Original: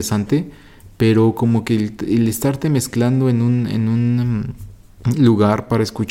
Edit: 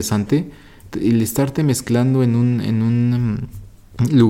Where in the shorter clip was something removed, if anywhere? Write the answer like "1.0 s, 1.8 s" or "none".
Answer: 0.9 s